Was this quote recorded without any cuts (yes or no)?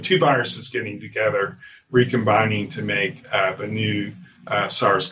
yes